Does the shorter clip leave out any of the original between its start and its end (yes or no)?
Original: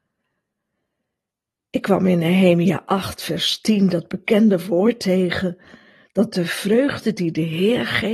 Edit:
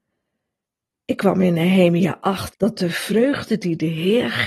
yes